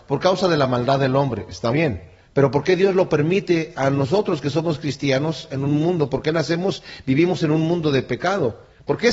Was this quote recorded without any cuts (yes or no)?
no